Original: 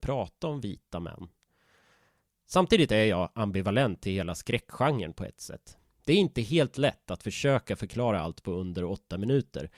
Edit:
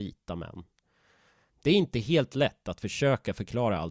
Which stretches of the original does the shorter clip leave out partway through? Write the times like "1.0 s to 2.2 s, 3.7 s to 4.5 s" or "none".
2.1 s to 5.9 s

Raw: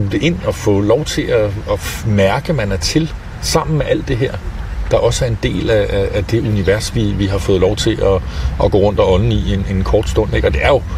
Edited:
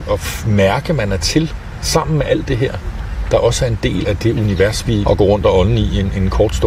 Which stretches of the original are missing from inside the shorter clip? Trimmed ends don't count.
5.6 s to 6.1 s, 7.1 s to 8.6 s

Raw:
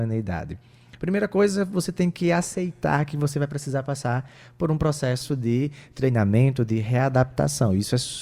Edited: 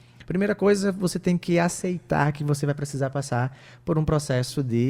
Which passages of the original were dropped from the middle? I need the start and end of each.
none

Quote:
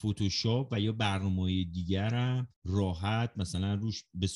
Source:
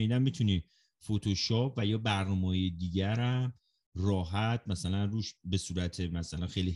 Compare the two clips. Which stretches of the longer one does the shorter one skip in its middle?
3.6 s to 3.8 s

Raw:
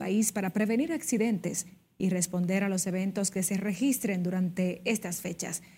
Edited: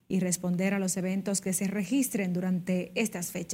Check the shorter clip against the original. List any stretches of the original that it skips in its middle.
none

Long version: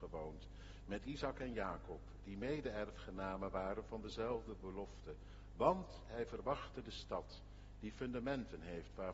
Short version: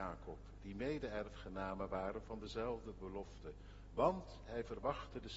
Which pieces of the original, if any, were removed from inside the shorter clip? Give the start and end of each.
none

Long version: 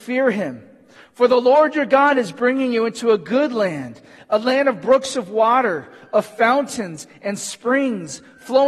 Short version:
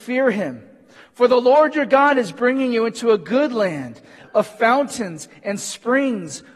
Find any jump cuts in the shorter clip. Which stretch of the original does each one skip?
4.2 s to 6.0 s

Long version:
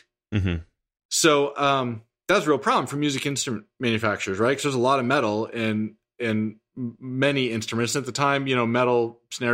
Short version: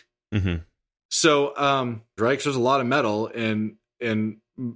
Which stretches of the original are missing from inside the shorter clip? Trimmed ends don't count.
2.2 s to 4.4 s

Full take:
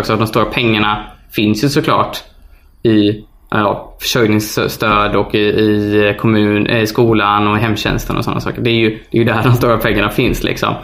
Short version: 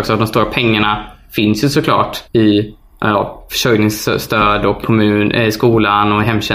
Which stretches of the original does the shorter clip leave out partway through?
2.2 s to 2.7 s, 5.3 s to 6.2 s

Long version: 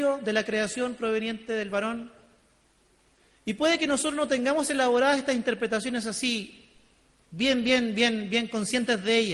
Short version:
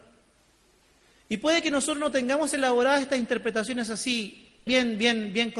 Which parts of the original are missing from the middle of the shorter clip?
6.8 s to 7.6 s

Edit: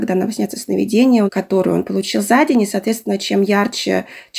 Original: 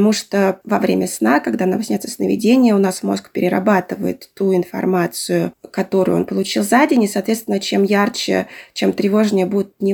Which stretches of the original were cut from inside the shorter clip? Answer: 2.8 s to 5.7 s

